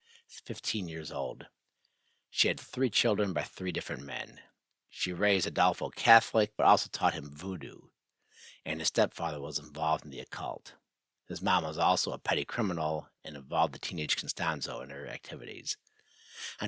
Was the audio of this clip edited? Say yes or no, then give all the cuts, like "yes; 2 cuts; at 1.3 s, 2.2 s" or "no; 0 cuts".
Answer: no; 0 cuts